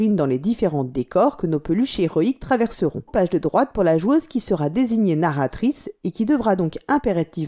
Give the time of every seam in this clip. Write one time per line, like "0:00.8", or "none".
0:03.1